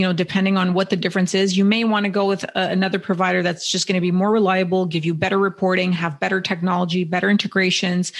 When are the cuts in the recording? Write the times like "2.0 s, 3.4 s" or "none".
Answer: none